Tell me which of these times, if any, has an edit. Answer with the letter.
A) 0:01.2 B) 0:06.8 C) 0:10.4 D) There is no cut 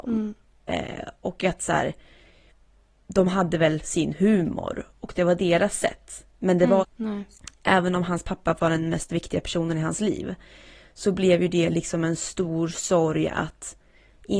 B